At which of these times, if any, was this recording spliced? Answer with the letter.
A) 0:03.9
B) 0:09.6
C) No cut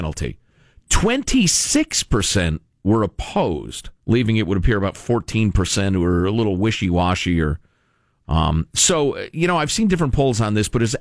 A